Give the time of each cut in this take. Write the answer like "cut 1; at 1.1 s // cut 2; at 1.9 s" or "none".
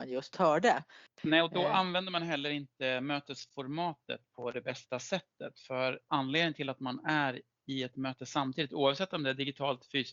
cut 1; at 1.1 s